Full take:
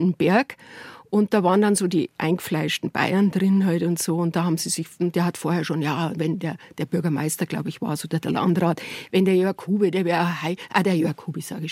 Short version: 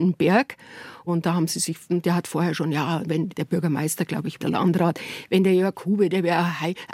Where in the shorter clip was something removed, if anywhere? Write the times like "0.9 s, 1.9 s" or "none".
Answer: 1.1 s, 3.3 s, 4.4 s